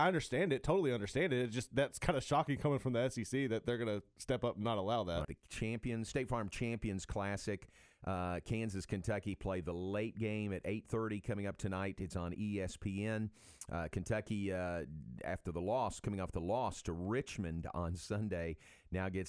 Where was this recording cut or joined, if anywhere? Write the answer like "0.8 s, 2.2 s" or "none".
5.2 s

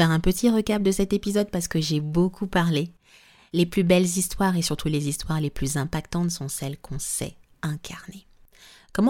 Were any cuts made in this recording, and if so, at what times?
none

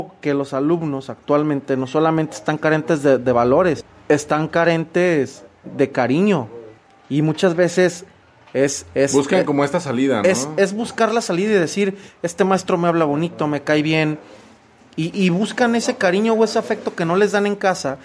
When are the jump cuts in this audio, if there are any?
15.1 s

